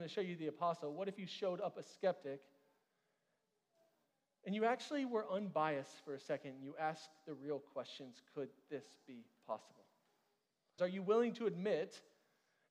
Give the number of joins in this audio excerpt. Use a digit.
1